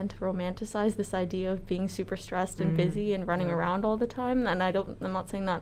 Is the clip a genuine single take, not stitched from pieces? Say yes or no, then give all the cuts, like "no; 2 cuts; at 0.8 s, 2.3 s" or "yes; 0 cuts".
yes; 0 cuts